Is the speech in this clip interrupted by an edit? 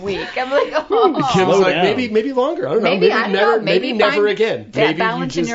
no; 0 cuts

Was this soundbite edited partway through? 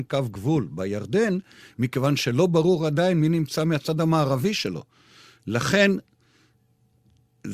no; 0 cuts

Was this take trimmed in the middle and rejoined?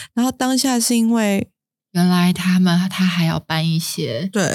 yes; 1 cut; at 1.8 s

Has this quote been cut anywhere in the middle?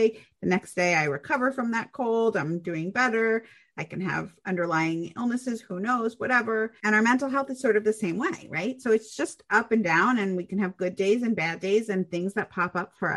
no; 0 cuts

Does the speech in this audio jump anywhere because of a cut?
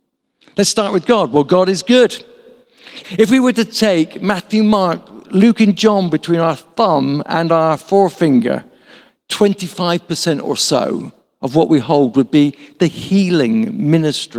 yes; 1 cut; at 3.0 s

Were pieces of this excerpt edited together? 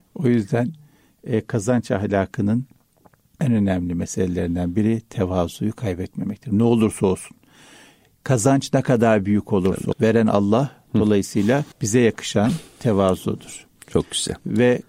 yes; 2 cuts; at 9.9 s, 11.7 s

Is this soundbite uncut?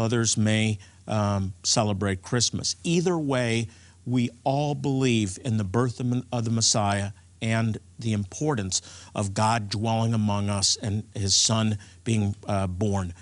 yes; 0 cuts

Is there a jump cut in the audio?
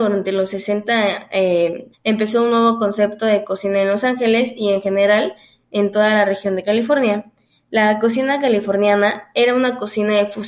yes; 1 cut; at 1.9 s

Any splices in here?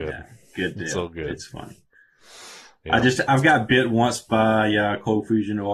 no; 0 cuts

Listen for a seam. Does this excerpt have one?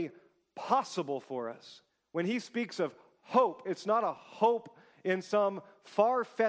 no; 0 cuts

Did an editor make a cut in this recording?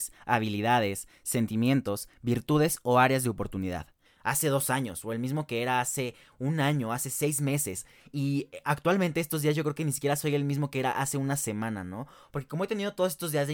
yes; 1 cut; at 4.1 s

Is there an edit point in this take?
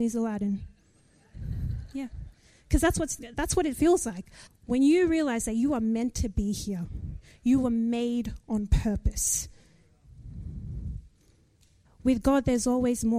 yes; 2 cuts; at 4.5 s, 11.8 s

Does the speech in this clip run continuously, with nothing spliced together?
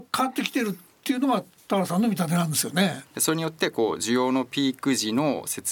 no; 1 cut; at 3.1 s

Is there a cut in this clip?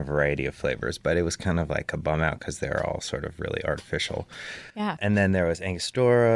no; 0 cuts

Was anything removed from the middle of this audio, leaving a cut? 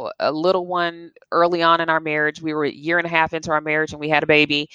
no; 0 cuts

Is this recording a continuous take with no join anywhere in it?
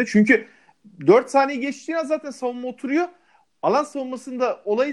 yes; 0 cuts

